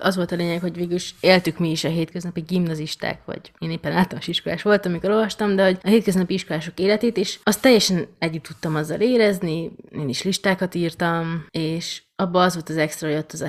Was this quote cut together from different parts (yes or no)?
no